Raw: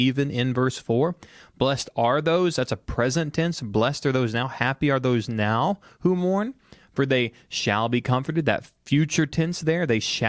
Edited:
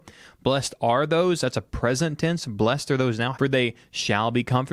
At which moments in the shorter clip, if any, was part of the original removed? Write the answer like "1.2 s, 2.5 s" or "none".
3.3 s